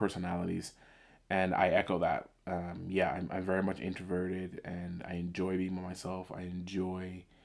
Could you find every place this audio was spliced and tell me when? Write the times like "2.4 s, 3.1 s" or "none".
none